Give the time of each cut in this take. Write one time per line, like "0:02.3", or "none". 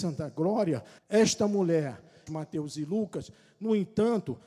0:01.0
0:02.3